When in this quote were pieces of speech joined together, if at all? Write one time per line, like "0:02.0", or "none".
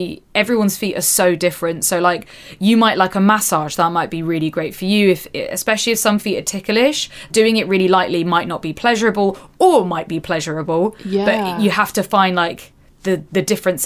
0:07.3